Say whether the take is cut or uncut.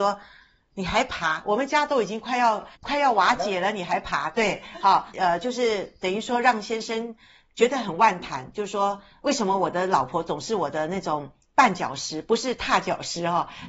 cut